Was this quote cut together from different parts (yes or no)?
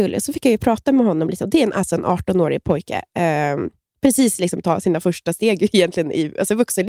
no